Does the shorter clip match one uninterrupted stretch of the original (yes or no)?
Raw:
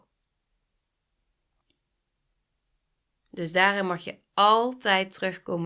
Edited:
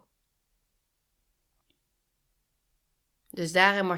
yes